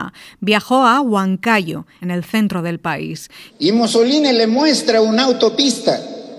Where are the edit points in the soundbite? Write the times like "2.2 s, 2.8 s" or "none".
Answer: 2.0 s, 3.5 s

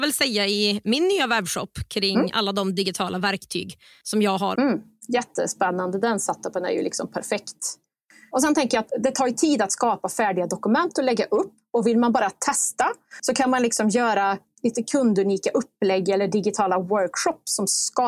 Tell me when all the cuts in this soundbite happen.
4.5 s

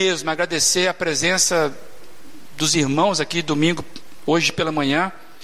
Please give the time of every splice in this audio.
none

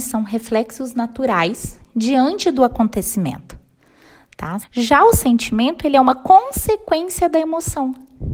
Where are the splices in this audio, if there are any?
4.6 s

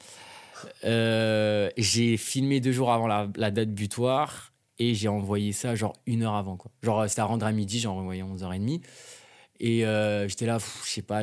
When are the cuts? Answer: none

